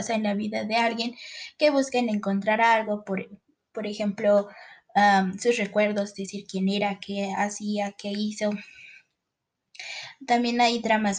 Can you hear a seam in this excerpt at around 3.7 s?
no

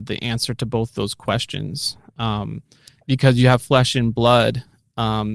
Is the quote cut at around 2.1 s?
no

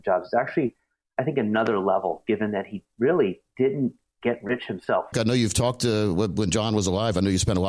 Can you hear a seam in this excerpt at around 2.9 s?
no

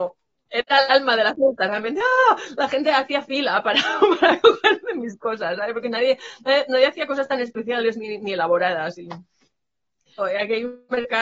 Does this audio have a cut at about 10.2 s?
yes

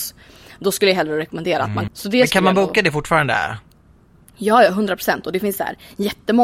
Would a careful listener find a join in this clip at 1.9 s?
yes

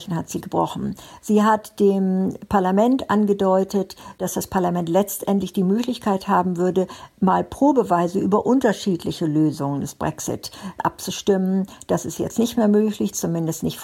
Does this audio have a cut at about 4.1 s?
no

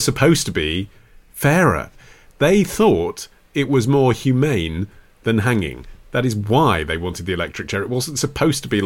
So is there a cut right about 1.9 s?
yes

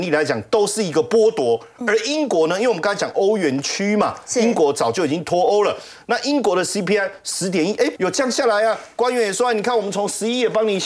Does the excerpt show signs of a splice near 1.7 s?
no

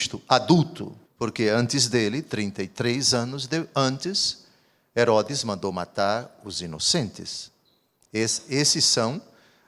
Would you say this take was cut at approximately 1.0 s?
yes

